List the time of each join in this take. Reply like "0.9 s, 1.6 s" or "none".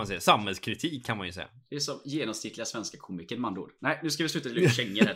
none